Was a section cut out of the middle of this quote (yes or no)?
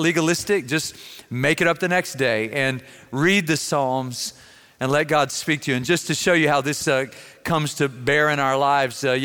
no